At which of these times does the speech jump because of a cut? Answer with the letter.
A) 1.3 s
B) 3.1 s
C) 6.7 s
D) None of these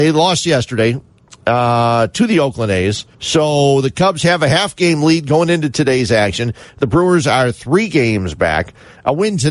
B